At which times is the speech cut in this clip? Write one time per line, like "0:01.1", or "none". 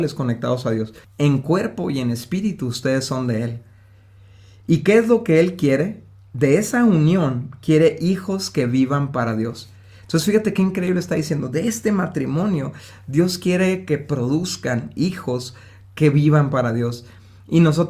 0:01.0